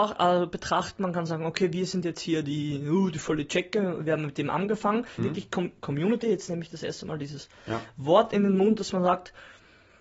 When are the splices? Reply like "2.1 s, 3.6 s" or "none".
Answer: 5.2 s